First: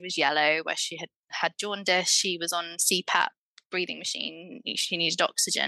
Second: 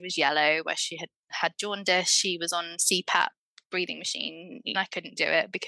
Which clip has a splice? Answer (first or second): second